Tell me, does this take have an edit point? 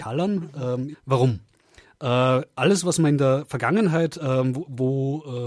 yes; 1 cut; at 0.9 s

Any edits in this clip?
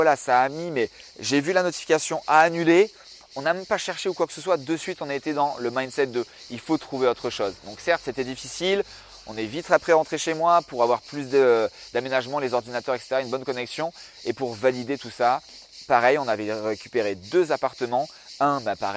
no; 0 cuts

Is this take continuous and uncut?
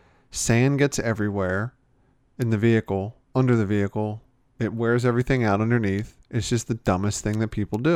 yes; 0 cuts

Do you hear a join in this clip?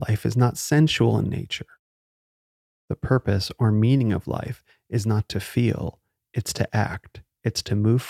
no; 0 cuts

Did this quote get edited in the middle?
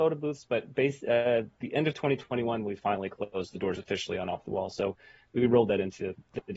no; 0 cuts

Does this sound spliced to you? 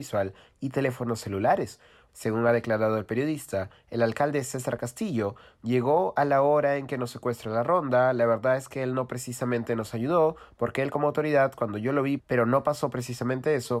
yes; 3 cuts; at 2.1 s, 10.5 s, 12.2 s

